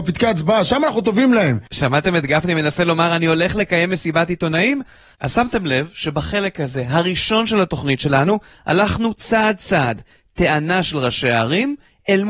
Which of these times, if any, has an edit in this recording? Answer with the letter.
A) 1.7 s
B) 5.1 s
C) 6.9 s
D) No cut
B